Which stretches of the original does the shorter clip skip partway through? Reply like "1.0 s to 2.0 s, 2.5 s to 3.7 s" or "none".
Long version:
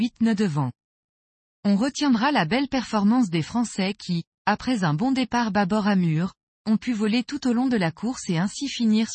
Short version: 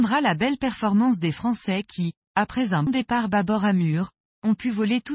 5.0 s to 5.1 s